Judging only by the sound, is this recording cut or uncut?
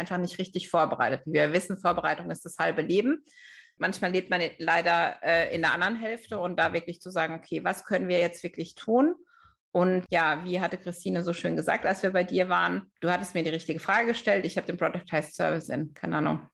uncut